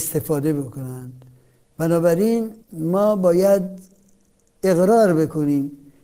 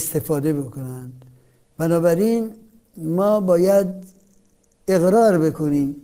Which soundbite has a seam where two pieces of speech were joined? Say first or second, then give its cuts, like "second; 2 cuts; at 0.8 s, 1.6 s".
first; 1 cut; at 2.6 s